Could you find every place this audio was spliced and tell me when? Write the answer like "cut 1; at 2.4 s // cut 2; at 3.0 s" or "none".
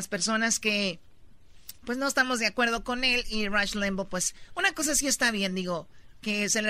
none

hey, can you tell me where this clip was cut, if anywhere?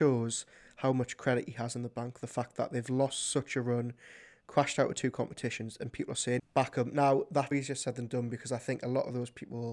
cut 1; at 6.4 s // cut 2; at 7.5 s

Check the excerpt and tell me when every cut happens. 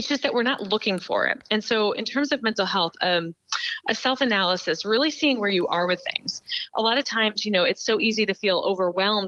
none

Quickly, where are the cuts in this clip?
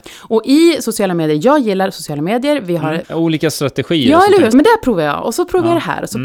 cut 1; at 3.0 s // cut 2; at 4.5 s

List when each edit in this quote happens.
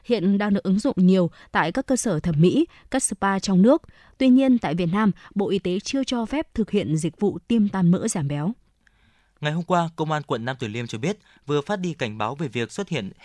none

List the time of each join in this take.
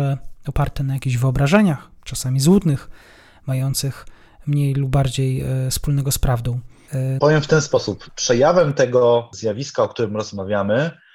cut 1; at 7.2 s

